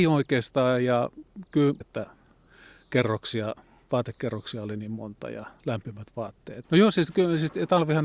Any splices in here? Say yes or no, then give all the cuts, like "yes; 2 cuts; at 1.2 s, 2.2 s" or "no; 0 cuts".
yes; 2 cuts; at 1.8 s, 6.6 s